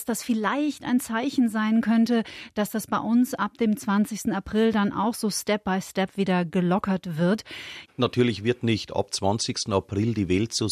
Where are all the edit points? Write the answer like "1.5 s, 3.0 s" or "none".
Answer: 7.9 s